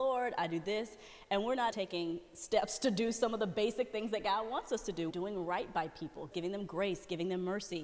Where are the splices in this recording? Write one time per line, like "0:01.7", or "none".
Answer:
0:01.7
0:05.1
0:06.3

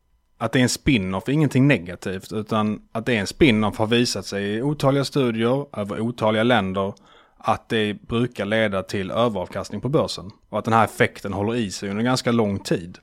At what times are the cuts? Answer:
none

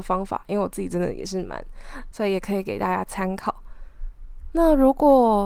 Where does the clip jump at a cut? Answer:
0:02.1

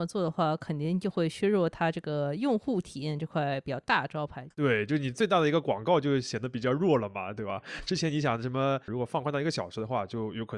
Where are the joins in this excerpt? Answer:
0:04.5
0:08.9

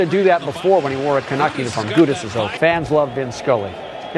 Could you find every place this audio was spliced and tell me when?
0:02.6

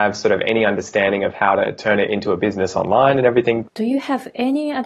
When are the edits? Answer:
0:03.6

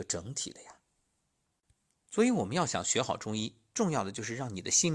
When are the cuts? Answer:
none

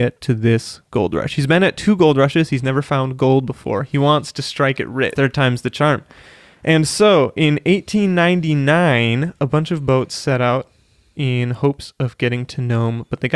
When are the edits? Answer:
0:05.2

